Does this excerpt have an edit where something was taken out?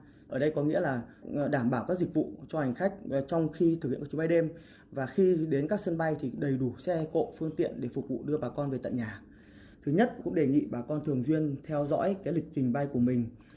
yes; 1 cut; at 9.7 s

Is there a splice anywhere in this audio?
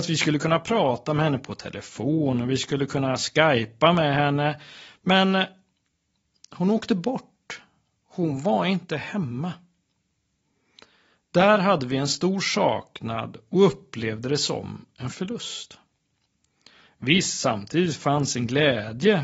no; 0 cuts

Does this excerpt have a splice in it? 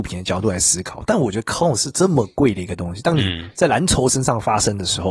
no; 0 cuts

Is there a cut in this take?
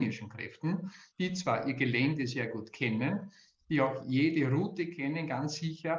no; 0 cuts

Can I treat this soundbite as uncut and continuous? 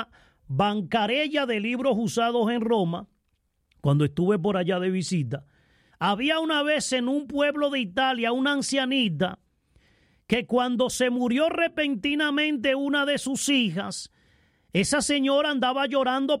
no; 1 cut; at 5.9 s

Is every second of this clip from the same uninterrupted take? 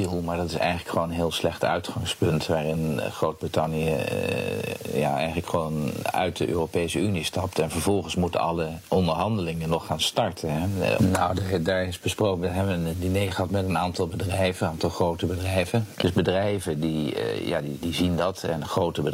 no; 3 cuts; at 11.0 s, 16.0 s, 17.8 s

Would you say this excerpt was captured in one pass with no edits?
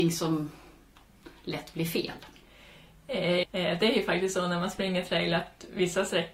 no; 1 cut; at 3.4 s

